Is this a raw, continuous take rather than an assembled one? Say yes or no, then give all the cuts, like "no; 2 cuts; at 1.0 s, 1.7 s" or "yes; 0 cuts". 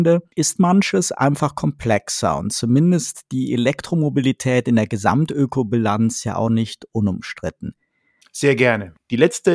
no; 1 cut; at 8.2 s